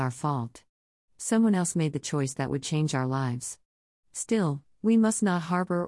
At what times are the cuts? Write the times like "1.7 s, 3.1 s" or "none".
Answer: none